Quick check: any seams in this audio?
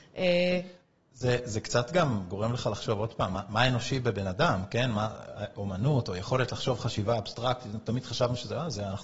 no; 0 cuts

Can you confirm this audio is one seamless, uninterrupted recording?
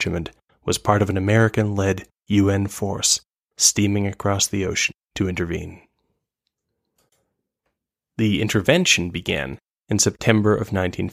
no; 1 cut; at 5.0 s

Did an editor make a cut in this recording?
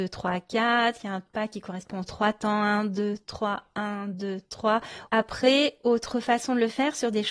yes; 1 cut; at 5.1 s

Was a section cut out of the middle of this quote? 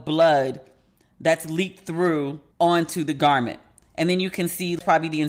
yes; 1 cut; at 2.5 s

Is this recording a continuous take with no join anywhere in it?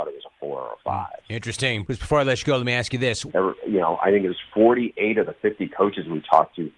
no; 2 cuts; at 1.8 s, 3.3 s

